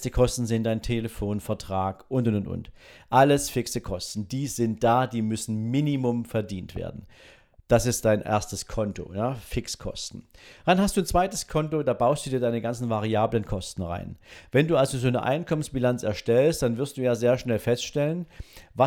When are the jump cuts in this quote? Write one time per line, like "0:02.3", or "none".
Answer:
none